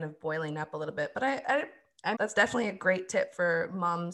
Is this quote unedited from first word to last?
no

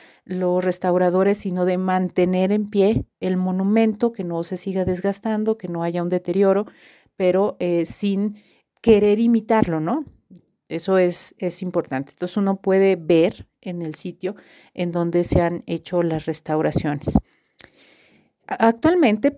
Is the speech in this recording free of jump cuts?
yes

